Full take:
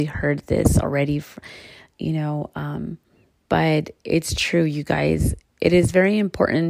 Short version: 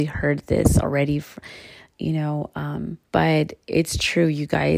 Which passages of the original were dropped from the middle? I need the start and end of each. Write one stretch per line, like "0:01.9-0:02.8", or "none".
0:03.1-0:03.4